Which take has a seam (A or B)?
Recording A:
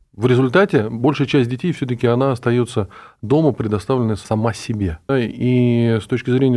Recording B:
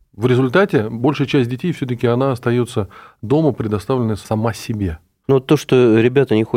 A